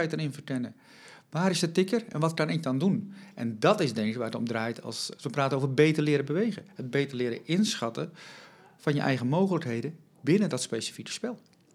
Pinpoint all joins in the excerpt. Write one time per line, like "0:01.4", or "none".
0:05.2